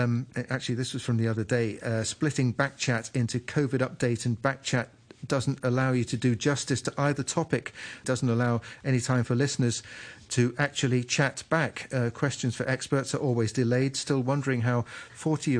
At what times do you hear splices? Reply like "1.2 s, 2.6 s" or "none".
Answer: 8.0 s